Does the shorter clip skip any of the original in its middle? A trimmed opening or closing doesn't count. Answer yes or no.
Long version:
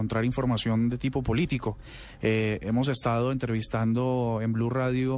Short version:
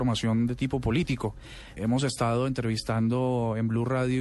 yes